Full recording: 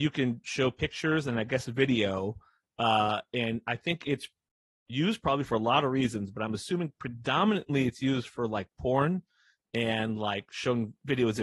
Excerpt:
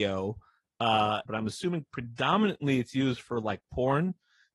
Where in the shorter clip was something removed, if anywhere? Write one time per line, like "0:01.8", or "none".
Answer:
0:01.3